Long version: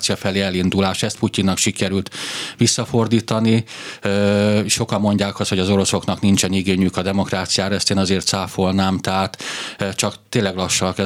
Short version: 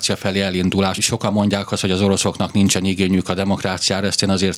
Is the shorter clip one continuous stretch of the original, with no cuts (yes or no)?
no